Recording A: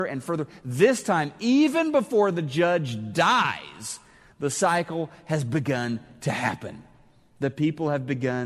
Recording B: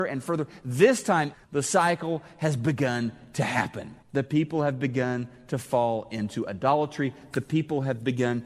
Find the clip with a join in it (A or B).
B